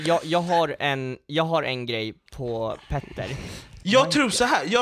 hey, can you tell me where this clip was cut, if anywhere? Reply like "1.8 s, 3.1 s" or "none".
3.8 s